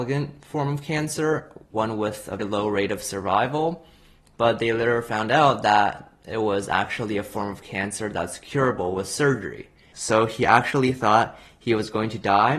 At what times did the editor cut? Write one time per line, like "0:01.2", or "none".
0:02.4
0:09.9